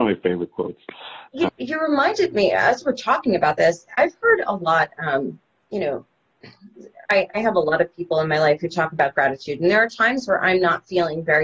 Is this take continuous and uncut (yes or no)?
no